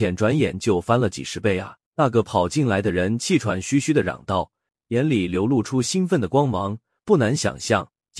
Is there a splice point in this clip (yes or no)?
yes